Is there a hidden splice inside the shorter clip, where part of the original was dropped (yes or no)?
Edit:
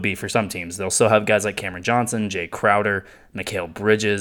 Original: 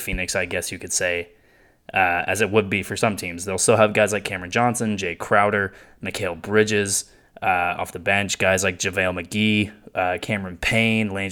no